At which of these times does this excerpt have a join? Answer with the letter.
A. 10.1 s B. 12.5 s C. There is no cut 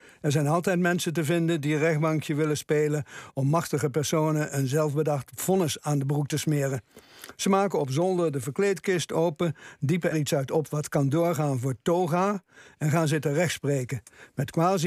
A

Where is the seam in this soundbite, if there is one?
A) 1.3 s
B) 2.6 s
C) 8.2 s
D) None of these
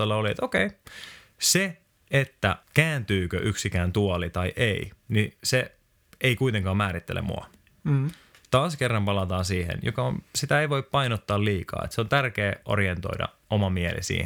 B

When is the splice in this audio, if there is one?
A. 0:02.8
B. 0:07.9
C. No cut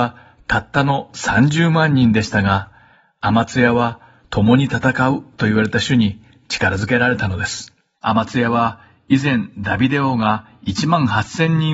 B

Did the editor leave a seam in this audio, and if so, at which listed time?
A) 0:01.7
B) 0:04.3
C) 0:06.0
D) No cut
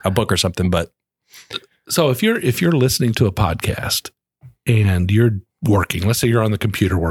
D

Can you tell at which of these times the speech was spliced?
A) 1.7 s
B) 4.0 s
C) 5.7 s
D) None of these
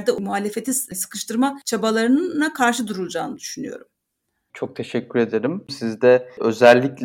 C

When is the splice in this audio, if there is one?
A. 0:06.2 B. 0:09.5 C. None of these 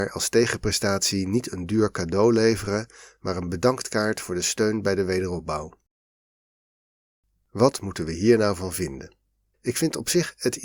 B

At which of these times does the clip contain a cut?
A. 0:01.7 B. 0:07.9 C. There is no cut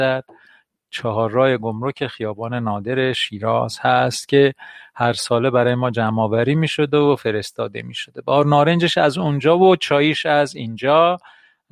C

